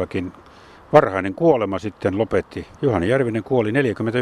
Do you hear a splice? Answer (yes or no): yes